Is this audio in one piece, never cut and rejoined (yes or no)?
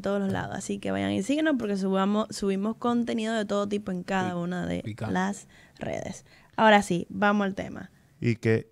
yes